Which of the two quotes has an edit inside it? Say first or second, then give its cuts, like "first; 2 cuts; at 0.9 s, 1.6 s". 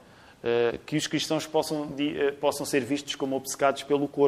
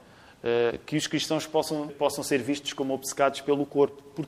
second; 1 cut; at 1.9 s